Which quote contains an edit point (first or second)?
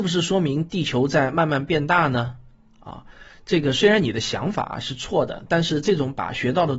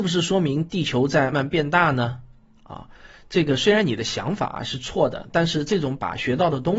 second